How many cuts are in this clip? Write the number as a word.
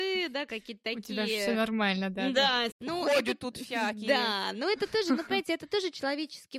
one